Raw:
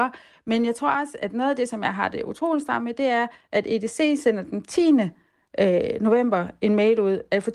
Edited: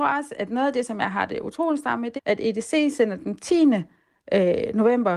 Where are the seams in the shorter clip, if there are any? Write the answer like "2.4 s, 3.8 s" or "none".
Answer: 2.2 s